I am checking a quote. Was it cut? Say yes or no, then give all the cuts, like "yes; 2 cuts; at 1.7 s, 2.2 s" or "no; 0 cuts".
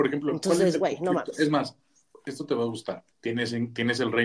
yes; 1 cut; at 3.1 s